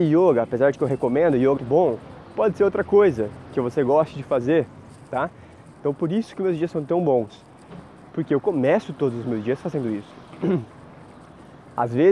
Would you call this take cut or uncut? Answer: cut